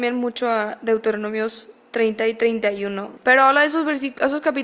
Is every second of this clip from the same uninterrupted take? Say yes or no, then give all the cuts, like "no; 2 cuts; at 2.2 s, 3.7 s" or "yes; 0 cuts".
yes; 0 cuts